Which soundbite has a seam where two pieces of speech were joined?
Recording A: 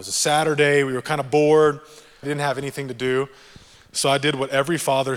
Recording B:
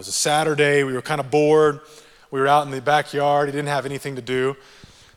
A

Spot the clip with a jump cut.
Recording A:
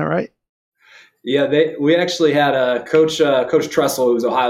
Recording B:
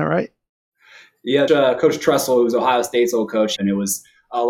B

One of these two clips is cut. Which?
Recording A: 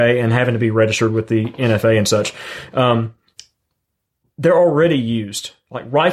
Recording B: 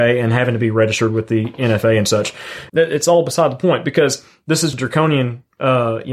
B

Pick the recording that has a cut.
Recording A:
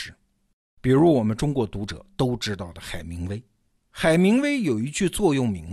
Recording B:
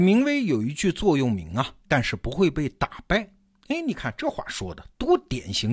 B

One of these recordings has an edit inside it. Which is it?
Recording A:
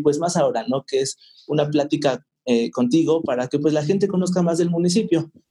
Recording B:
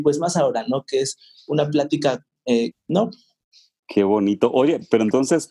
B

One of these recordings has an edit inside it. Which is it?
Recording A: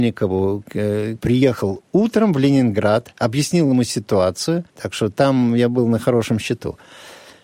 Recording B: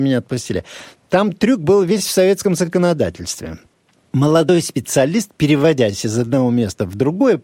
A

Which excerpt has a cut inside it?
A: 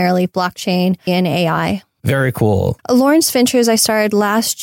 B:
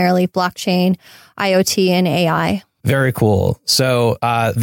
A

